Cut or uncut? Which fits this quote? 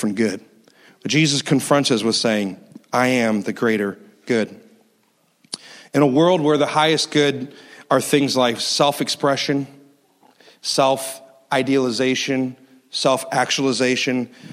uncut